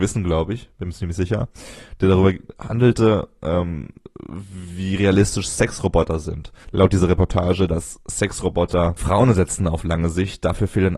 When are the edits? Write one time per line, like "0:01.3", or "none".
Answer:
0:06.6